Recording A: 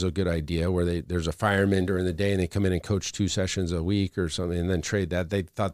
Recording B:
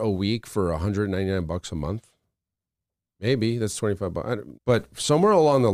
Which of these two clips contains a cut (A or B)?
B